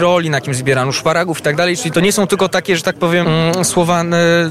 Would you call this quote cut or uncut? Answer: cut